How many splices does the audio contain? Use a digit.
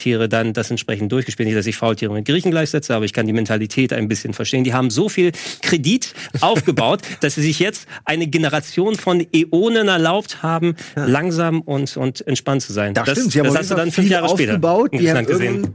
0